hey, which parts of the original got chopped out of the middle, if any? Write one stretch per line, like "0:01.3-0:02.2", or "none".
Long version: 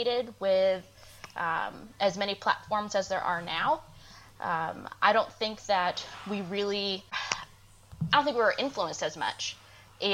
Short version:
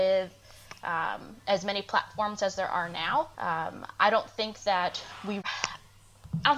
0:03.9-0:04.4
0:06.4-0:07.1